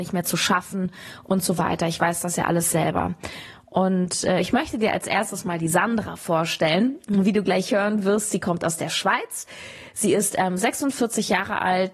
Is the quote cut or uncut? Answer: uncut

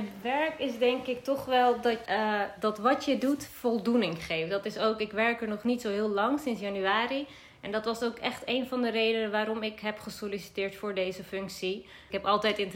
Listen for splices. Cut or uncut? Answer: cut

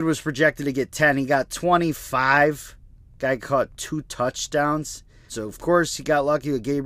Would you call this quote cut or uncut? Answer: cut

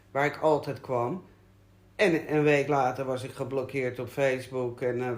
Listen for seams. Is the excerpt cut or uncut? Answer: uncut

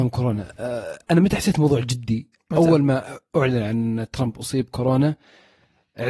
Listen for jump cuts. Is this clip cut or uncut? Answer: uncut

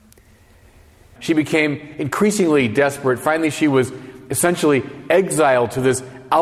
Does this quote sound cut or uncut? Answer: cut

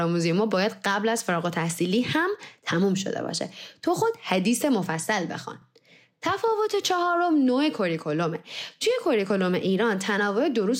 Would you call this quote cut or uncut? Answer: uncut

